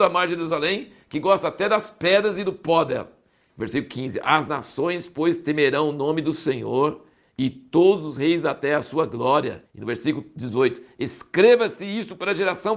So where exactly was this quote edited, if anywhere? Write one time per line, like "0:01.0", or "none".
0:09.6